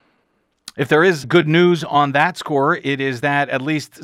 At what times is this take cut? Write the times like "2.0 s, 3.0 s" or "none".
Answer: 1.2 s